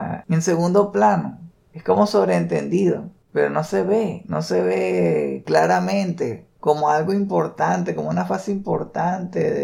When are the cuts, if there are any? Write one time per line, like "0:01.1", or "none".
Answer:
none